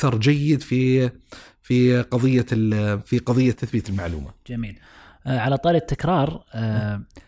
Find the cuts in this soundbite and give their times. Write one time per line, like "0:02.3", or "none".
0:03.5